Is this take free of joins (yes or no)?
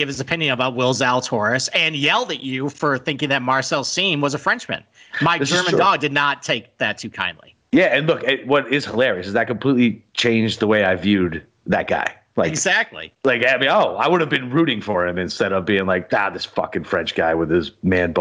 yes